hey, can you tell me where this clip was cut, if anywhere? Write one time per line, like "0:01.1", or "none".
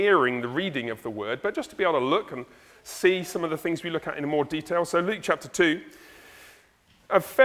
none